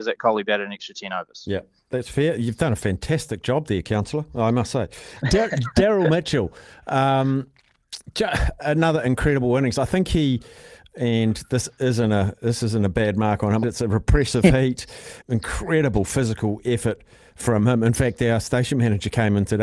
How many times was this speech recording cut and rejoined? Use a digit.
3